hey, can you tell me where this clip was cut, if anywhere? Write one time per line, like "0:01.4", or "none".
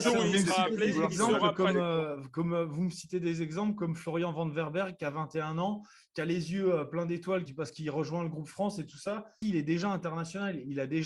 0:07.5
0:09.4